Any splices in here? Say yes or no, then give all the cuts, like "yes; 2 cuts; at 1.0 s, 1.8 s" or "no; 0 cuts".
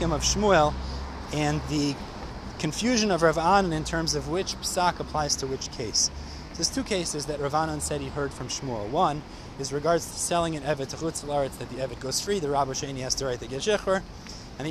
no; 0 cuts